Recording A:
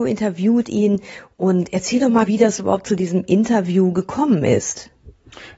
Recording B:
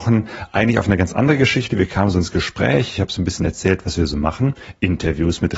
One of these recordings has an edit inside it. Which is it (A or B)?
A